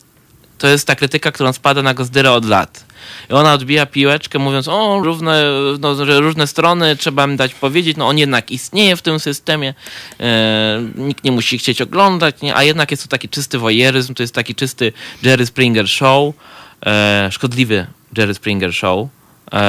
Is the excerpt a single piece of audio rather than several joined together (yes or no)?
no